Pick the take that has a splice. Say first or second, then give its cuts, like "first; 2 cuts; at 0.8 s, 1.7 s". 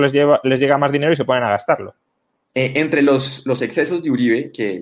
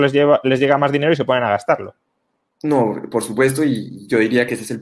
first; 1 cut; at 2.5 s